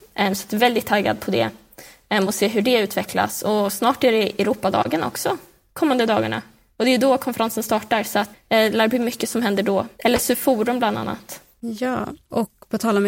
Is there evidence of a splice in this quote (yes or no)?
yes